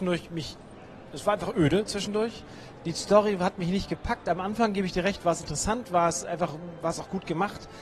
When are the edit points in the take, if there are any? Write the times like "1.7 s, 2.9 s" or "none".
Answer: none